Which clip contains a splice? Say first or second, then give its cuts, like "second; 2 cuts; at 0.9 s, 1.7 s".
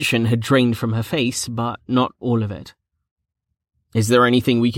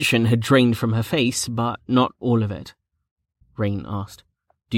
second; 1 cut; at 3.4 s